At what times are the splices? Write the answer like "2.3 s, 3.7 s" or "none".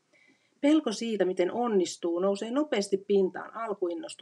none